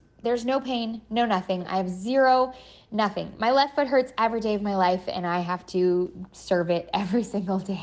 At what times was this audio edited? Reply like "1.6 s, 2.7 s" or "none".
none